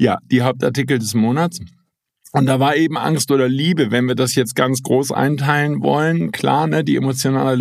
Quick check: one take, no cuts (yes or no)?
yes